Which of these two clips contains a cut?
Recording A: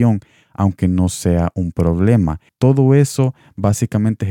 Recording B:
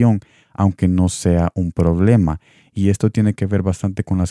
A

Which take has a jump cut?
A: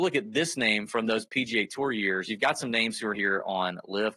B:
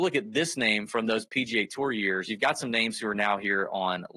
A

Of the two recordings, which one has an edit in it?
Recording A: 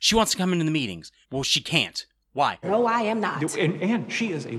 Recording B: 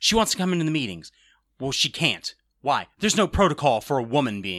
A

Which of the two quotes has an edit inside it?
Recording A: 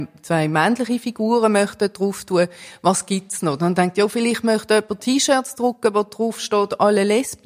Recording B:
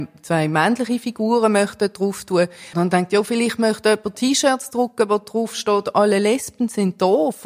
B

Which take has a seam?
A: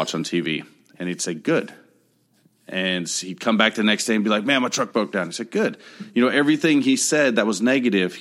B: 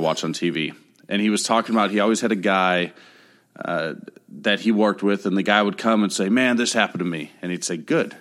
A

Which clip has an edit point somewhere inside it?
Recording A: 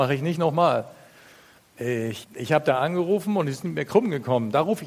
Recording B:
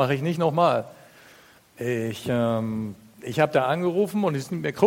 A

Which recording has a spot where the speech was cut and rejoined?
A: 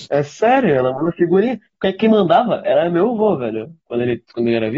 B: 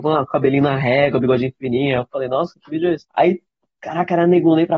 B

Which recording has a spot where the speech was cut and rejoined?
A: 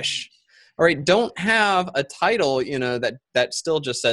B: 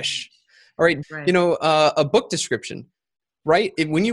B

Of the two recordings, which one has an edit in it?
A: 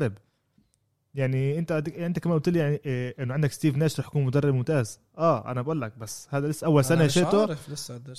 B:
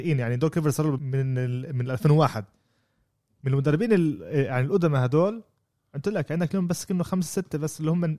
B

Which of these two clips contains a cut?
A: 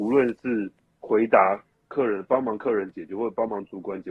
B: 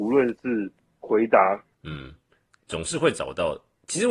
B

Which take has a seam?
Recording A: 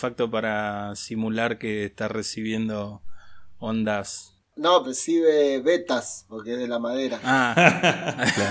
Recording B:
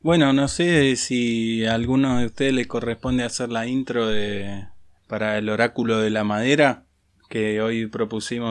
A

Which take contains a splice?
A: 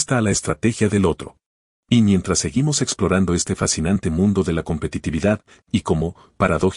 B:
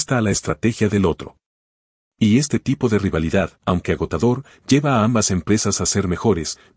A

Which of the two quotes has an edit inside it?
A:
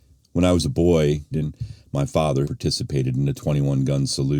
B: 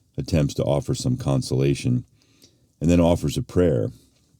A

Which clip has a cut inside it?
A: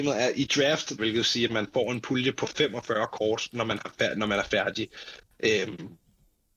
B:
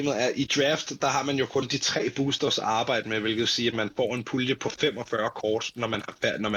A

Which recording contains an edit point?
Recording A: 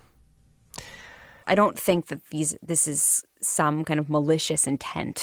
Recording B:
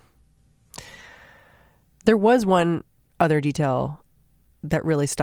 A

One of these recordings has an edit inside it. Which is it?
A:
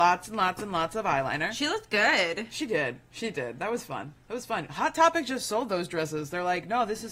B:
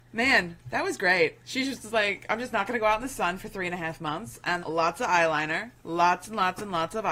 B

